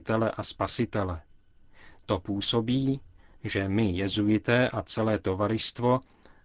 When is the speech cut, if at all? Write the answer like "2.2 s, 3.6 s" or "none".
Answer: none